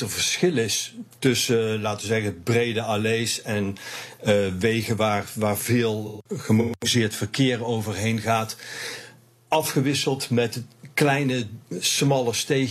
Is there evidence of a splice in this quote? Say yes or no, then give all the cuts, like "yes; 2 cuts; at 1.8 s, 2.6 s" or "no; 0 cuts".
no; 0 cuts